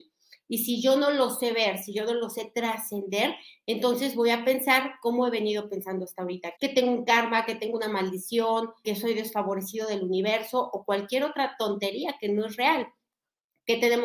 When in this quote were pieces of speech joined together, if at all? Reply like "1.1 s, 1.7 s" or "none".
6.6 s, 8.8 s